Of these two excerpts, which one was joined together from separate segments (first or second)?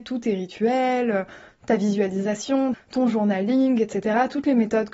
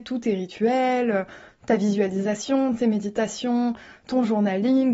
first